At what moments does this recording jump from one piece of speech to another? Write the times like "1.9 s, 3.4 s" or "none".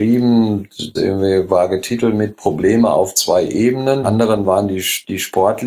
0.9 s, 4.0 s